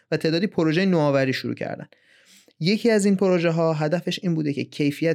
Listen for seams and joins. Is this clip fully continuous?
yes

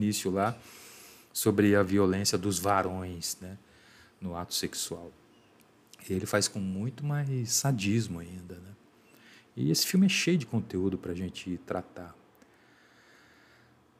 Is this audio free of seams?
yes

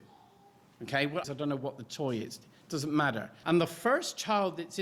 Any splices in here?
yes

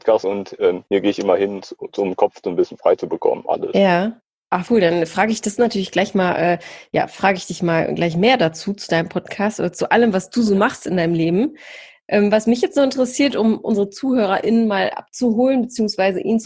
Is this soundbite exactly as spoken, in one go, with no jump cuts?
no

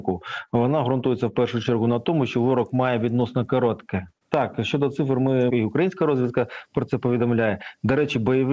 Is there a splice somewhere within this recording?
yes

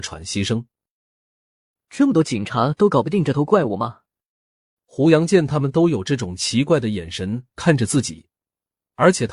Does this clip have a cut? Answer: yes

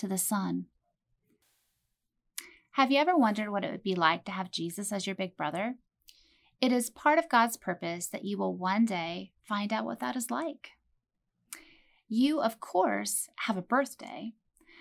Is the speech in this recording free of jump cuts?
yes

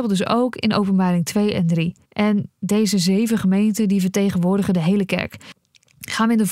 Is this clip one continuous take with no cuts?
no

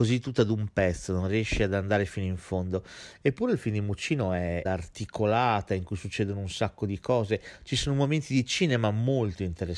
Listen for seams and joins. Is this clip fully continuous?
no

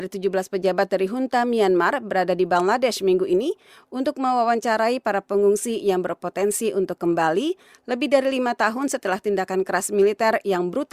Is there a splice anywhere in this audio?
no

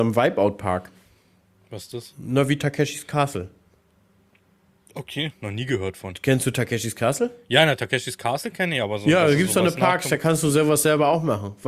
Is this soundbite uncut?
yes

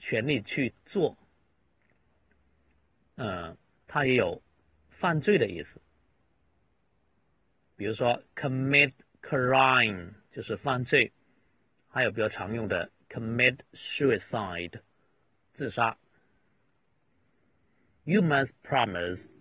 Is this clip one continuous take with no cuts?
yes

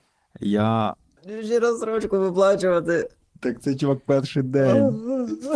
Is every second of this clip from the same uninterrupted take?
no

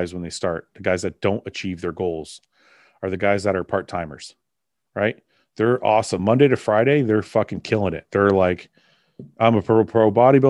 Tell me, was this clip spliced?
no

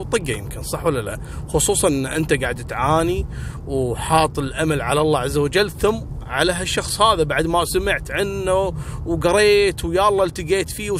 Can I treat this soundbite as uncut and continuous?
yes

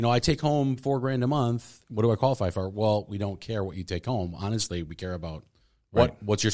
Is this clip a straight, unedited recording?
yes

